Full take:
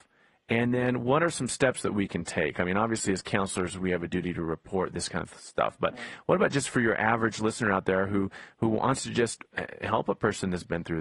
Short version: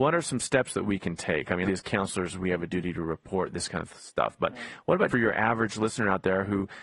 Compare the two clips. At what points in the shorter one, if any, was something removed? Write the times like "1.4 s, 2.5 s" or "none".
1.6 s, 5.1 s